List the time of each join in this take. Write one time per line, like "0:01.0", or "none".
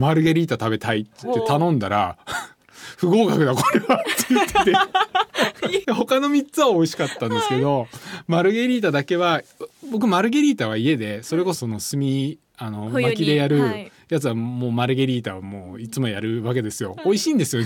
0:05.8
0:11.5

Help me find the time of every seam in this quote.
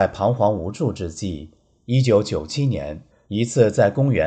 0:03.1

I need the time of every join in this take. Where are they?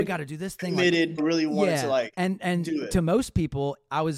0:01.2

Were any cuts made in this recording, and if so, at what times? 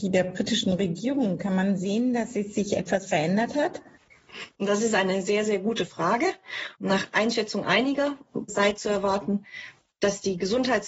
0:06.7
0:08.5

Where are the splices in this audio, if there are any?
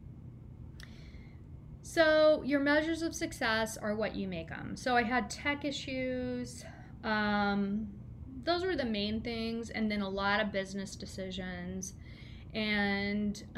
none

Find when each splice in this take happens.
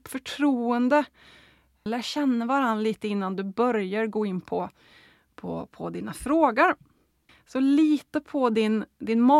0:01.9
0:07.3

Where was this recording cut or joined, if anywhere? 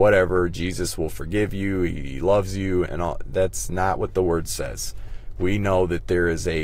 0:02.9

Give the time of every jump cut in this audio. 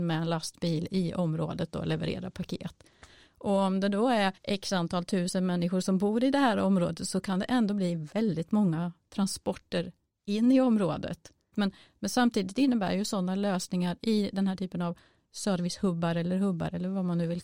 0:04.4
0:11.5

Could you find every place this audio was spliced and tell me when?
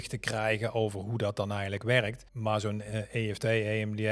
0:02.3

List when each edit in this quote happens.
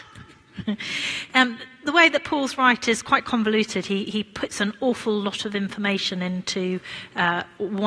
none

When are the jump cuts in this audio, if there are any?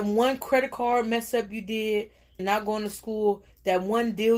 0:02.4

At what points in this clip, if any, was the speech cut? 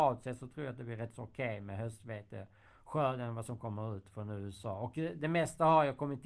none

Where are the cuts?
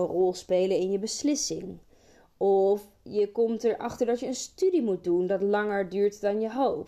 none

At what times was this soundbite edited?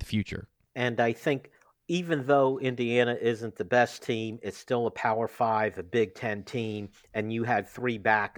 none

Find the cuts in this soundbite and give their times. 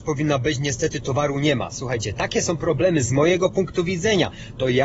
none

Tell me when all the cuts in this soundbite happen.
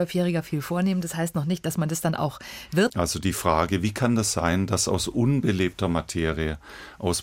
0:02.9

